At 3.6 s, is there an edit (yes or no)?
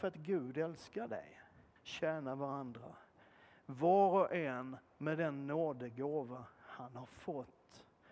no